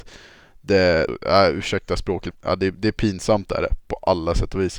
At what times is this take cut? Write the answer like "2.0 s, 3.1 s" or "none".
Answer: 1.1 s, 2.3 s